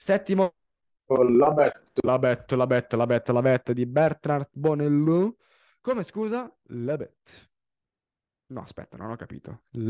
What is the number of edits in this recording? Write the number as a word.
zero